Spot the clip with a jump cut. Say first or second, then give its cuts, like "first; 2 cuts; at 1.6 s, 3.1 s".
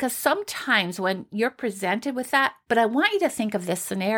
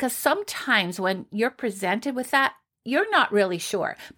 first; 1 cut; at 2.7 s